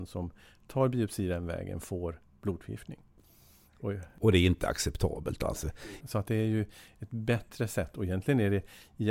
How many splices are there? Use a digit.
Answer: 1